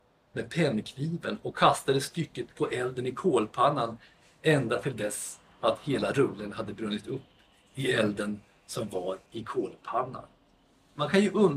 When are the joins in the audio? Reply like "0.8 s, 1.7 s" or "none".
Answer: 9.3 s